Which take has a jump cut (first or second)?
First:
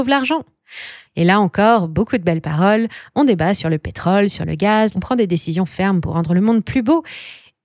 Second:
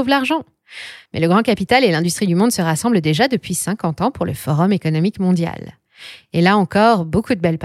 first